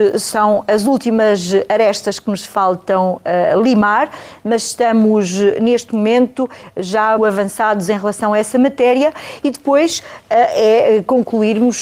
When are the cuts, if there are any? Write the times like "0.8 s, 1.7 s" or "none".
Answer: 7.2 s